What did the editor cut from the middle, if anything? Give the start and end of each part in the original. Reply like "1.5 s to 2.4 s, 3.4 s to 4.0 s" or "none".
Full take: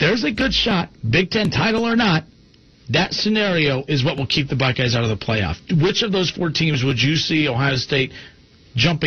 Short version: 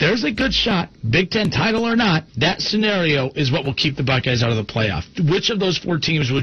2.3 s to 2.8 s